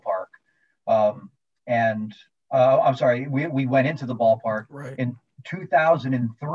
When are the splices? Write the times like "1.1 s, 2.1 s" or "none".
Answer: none